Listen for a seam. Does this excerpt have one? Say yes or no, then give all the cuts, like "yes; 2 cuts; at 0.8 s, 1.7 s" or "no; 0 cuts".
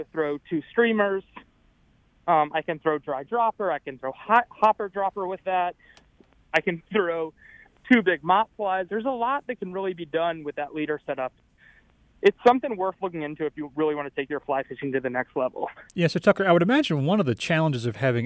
yes; 2 cuts; at 8.9 s, 15.9 s